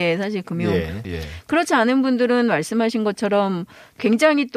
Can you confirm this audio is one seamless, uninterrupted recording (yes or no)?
no